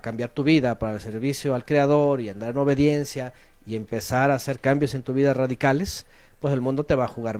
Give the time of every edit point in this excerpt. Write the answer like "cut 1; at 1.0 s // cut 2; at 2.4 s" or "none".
none